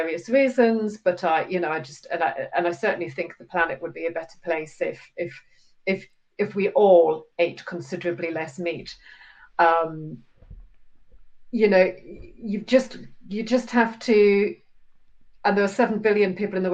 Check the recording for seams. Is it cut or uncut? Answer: uncut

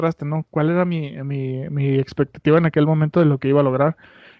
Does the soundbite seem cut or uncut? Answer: uncut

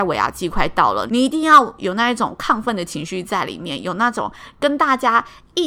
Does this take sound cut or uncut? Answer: cut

